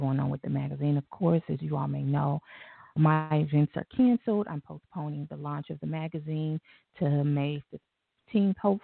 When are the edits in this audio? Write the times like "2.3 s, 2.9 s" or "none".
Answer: 3.0 s